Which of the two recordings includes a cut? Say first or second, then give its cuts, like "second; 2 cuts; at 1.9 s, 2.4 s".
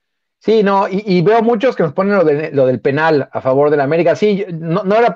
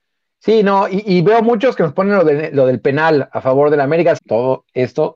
second; 1 cut; at 4.2 s